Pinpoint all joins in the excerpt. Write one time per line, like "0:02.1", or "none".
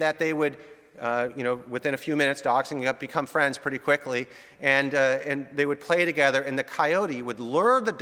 none